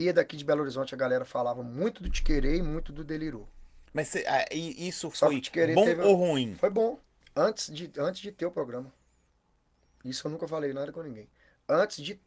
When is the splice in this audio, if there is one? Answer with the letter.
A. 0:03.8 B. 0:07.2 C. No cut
B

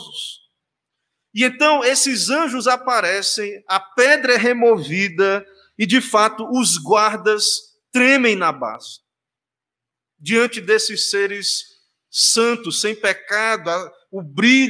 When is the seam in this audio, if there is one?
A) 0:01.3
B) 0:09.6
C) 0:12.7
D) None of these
D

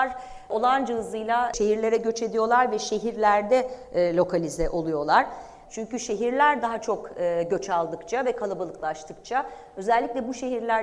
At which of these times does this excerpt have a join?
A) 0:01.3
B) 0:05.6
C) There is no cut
B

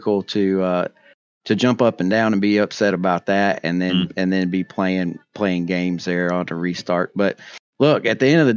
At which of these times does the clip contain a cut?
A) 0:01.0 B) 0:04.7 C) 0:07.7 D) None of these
C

